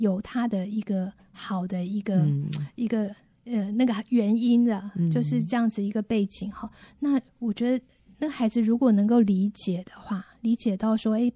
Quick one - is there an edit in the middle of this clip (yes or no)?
no